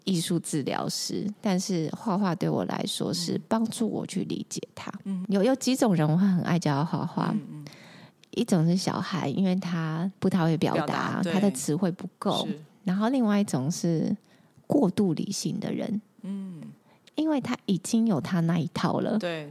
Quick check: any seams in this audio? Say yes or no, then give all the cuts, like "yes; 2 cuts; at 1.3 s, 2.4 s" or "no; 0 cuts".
no; 0 cuts